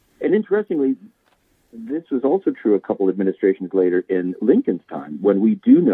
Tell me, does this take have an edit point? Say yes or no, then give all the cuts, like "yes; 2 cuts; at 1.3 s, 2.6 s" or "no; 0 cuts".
no; 0 cuts